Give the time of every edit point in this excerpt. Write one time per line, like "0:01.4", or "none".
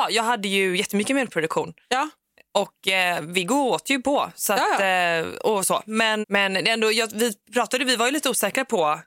0:06.2